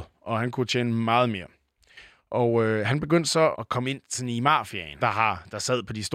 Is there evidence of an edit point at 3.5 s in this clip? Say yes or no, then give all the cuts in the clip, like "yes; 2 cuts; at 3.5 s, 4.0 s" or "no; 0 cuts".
yes; 2 cuts; at 3.5 s, 5.0 s